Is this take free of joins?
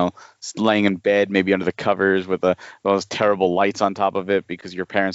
yes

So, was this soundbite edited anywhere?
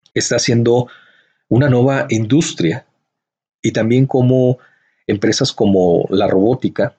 no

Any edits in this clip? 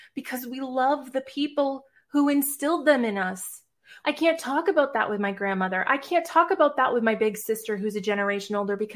yes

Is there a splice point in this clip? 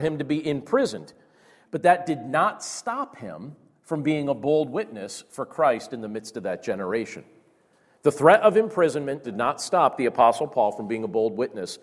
yes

